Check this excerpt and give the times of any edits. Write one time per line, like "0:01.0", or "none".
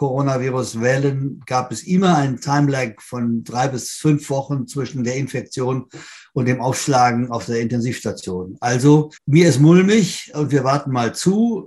0:09.2
0:10.3